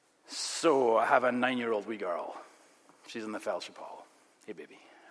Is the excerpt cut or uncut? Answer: uncut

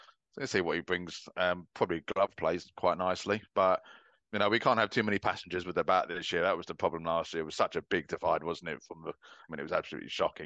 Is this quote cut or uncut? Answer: cut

